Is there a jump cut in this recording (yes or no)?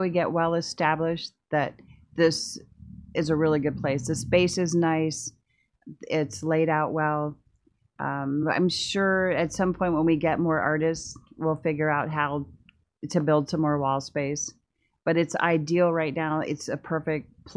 no